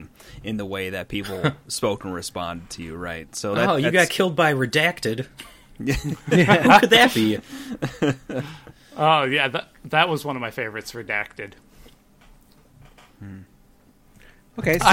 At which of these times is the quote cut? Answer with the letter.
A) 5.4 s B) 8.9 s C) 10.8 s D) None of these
D